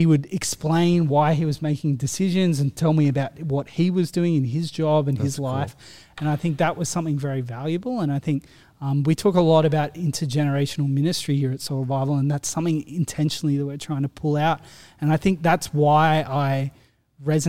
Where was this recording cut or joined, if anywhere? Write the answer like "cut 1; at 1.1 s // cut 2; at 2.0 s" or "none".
none